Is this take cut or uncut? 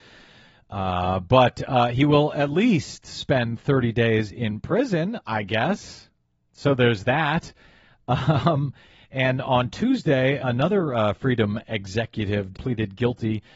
cut